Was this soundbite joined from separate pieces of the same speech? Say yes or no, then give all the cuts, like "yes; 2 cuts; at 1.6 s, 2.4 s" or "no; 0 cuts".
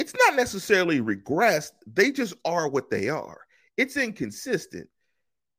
no; 0 cuts